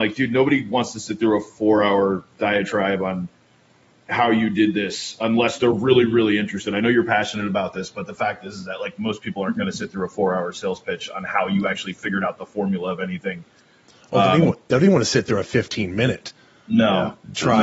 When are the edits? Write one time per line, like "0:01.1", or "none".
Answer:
none